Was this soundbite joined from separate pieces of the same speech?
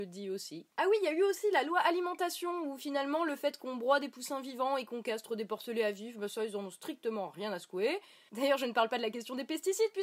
yes; 1 cut; at 8.3 s

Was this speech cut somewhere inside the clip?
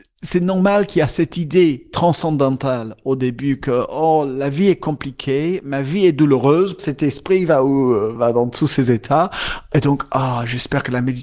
yes; 2 cuts; at 6.8 s, 8.2 s

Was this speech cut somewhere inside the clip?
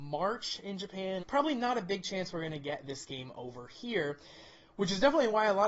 yes; 1 cut; at 1.2 s

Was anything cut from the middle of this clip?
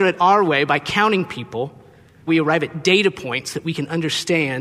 yes; 1 cut; at 2.3 s

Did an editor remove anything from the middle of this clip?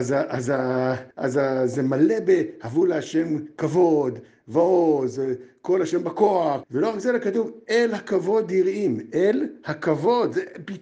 yes; 2 cuts; at 1.1 s, 6.6 s

